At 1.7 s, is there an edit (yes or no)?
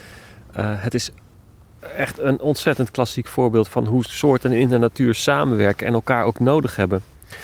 no